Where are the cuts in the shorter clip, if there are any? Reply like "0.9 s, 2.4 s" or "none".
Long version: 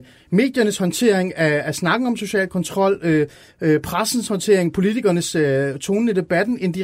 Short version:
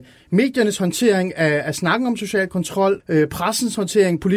3.0 s